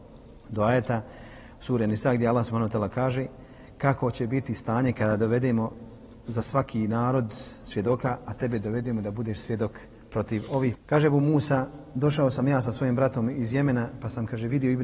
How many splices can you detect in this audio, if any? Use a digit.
1